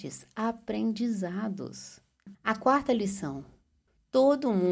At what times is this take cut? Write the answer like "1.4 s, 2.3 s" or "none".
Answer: 2.3 s